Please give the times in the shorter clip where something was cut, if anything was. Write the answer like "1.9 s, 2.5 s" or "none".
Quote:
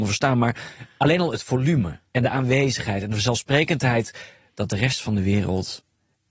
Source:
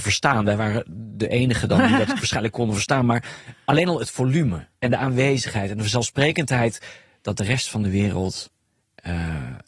none